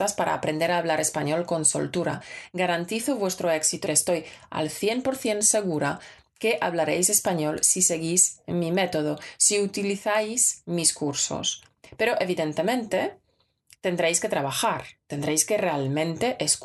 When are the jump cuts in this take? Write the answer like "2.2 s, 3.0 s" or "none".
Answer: 3.9 s